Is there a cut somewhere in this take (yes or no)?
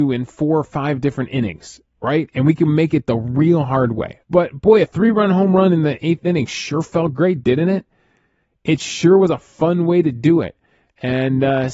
yes